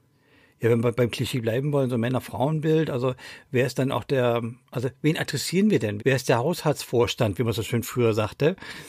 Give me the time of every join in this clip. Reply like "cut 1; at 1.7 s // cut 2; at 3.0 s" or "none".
cut 1; at 6.0 s